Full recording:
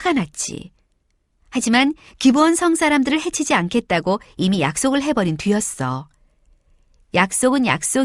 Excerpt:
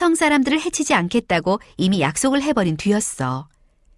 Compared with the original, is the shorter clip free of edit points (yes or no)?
yes